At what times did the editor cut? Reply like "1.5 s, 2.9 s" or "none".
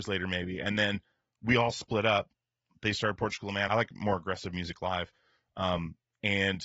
3.7 s